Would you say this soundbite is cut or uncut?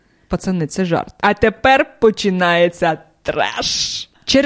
cut